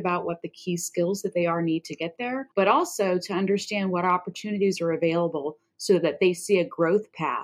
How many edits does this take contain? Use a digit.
1